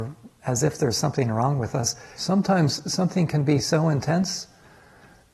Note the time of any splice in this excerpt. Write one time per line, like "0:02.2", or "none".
0:02.2